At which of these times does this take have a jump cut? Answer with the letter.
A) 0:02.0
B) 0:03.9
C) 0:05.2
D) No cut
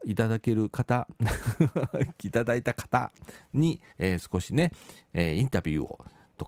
B